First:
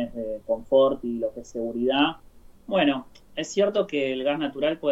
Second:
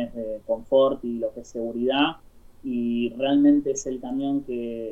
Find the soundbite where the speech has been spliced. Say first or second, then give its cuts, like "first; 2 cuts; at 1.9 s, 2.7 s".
first; 1 cut; at 2.5 s